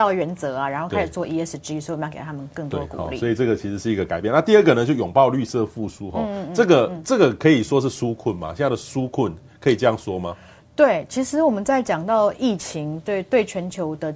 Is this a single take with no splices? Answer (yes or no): yes